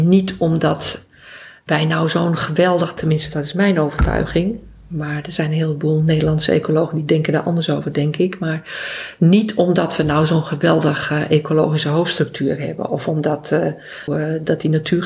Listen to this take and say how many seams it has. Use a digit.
1